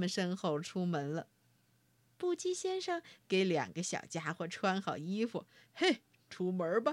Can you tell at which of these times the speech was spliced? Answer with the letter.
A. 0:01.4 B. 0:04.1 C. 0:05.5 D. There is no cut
D